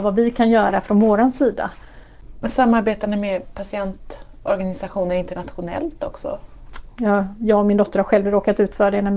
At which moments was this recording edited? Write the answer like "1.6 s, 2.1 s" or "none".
2.4 s, 6.9 s